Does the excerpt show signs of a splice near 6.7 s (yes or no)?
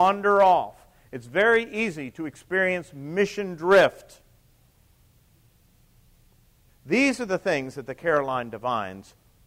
yes